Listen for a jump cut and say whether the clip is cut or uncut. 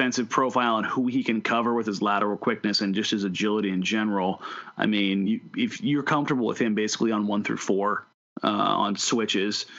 uncut